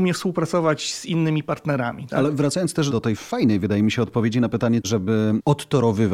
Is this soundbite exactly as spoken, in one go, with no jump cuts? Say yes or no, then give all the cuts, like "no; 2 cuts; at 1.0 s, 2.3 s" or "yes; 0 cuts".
no; 1 cut; at 4.8 s